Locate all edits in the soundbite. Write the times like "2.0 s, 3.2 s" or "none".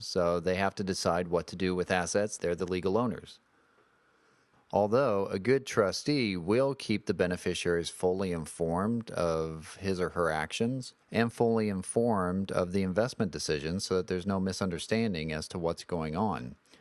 2.4 s, 4.5 s, 11.0 s